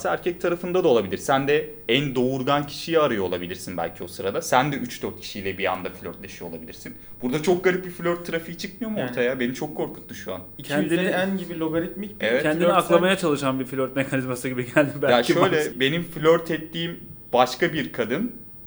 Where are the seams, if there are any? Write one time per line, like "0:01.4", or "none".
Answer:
0:15.7